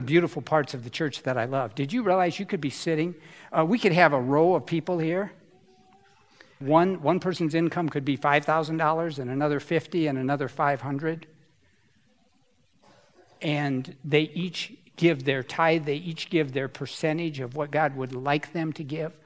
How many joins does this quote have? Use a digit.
1